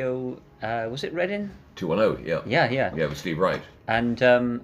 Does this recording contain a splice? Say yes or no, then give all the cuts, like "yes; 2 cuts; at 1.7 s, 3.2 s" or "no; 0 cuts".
no; 0 cuts